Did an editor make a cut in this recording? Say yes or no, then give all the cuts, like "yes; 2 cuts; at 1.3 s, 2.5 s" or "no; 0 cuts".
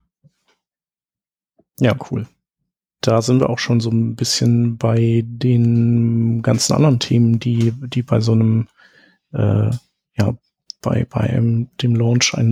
no; 0 cuts